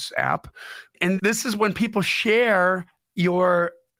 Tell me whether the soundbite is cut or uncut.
uncut